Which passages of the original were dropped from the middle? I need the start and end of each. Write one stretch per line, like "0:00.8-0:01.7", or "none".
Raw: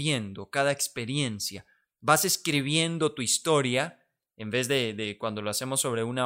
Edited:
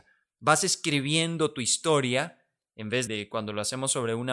0:04.7-0:05.0